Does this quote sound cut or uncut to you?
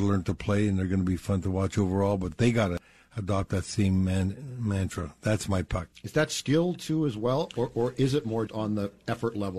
cut